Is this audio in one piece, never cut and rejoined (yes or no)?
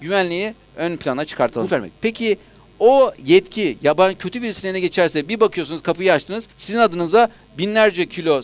no